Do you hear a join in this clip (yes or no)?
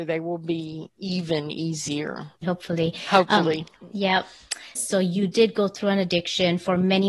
yes